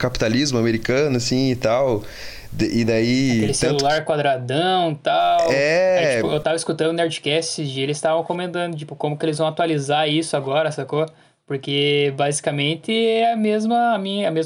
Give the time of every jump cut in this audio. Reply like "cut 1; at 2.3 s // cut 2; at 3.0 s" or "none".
none